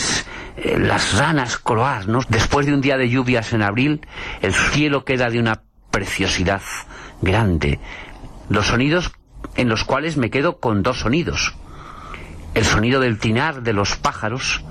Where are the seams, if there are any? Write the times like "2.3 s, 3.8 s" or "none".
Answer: 2.2 s, 8.4 s